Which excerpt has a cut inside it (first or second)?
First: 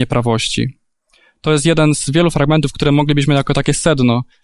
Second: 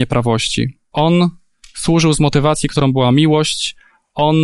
second